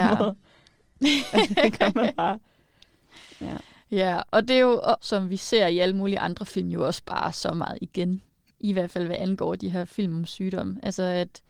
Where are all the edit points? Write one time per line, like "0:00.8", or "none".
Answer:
0:05.0
0:08.5